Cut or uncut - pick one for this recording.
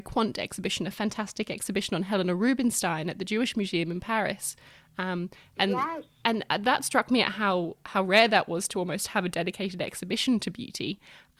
uncut